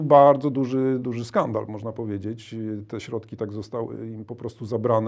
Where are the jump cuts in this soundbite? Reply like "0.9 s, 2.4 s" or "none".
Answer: 1.0 s